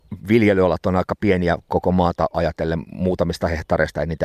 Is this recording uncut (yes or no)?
yes